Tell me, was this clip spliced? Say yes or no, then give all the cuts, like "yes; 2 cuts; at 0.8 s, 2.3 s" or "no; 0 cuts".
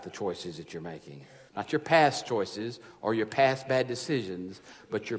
yes; 1 cut; at 1.5 s